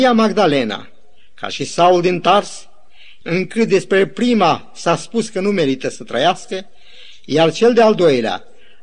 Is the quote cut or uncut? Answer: cut